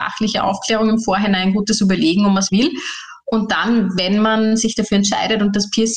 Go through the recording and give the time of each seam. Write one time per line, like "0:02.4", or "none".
0:02.5

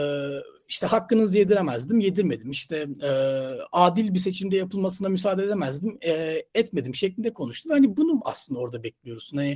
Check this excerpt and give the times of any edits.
none

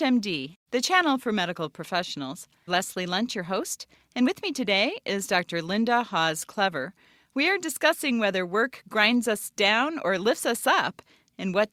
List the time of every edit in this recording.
0:02.7

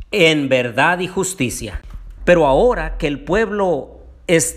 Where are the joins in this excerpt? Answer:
0:02.2

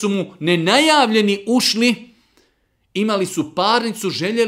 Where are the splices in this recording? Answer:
none

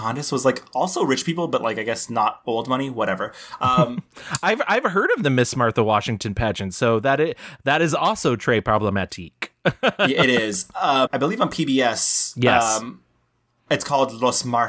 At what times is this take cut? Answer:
0:11.1

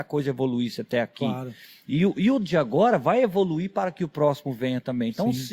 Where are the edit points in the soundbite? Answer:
none

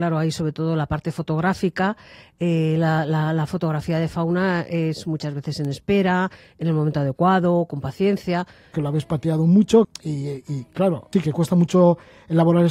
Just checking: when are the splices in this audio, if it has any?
0:08.7
0:09.8
0:11.1

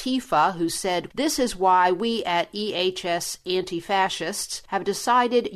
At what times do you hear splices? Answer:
0:01.1

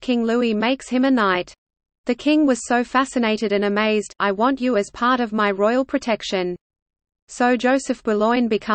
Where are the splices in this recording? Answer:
0:04.2

